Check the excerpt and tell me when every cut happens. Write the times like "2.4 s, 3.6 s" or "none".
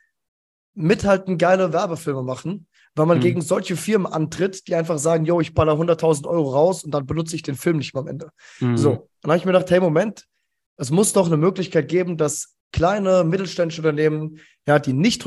none